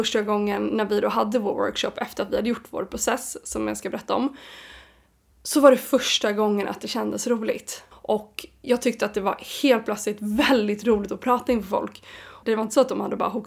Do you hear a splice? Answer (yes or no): yes